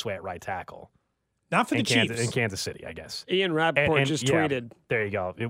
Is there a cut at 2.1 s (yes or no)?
no